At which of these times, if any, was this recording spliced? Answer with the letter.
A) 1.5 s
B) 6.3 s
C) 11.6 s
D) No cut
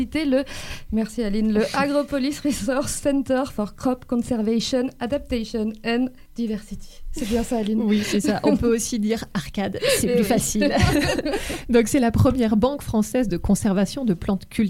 B